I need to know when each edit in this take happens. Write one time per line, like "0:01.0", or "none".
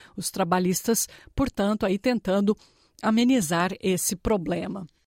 none